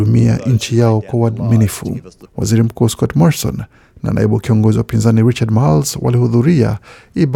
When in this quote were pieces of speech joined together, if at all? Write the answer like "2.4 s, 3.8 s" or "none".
2.3 s

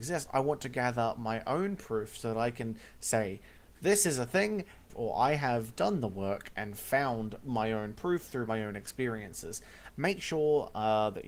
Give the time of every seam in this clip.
4.9 s, 9.9 s

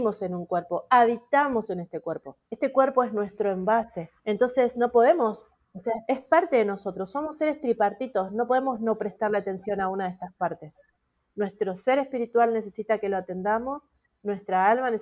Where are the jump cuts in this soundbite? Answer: 2.5 s, 4.2 s

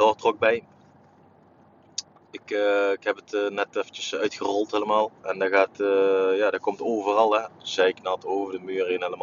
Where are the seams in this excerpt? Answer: 5.2 s, 7.5 s

